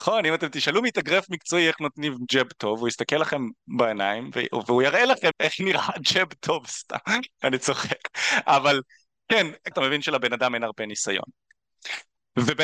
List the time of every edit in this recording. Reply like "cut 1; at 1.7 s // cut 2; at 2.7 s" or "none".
cut 1; at 5.3 s // cut 2; at 9.7 s